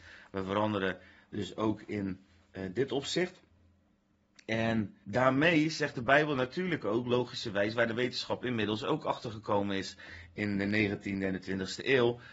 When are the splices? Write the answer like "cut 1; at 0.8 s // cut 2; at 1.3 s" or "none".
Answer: cut 1; at 5.0 s